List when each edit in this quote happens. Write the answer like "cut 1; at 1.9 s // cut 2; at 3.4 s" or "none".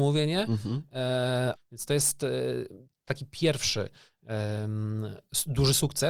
cut 1; at 1.6 s